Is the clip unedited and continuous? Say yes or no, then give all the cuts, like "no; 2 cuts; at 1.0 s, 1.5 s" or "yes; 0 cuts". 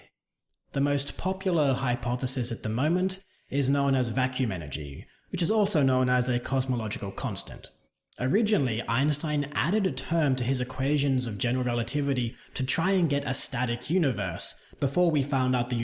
yes; 0 cuts